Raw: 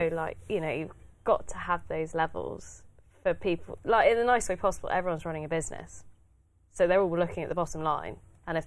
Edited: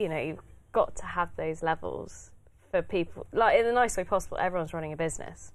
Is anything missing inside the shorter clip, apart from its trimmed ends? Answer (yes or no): no